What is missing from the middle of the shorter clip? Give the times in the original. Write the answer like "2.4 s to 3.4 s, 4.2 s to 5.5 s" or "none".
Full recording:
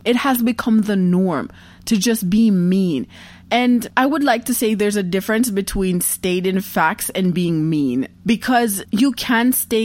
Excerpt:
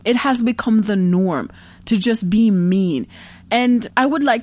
none